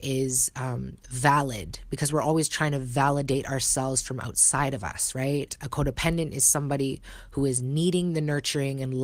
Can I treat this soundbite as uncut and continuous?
no; 1 cut; at 5.5 s

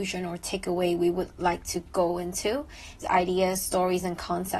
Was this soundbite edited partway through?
yes; 1 cut; at 3.0 s

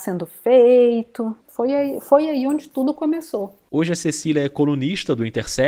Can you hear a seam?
yes; 1 cut; at 1.4 s

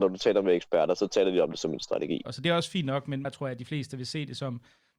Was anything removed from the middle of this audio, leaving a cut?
yes; 2 cuts; at 2.2 s, 3.2 s

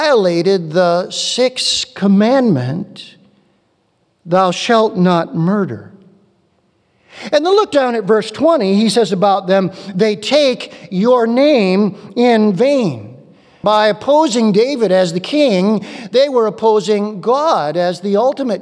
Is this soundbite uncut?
no; 1 cut; at 13.6 s

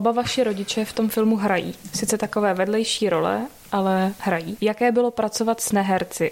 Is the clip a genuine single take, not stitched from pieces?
yes; 0 cuts

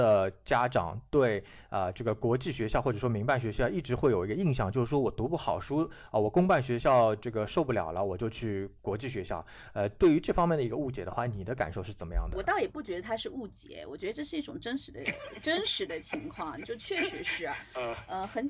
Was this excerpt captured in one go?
yes; 0 cuts

